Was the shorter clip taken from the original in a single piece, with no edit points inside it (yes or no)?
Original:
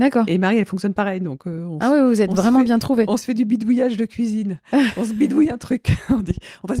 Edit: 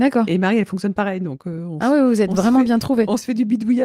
yes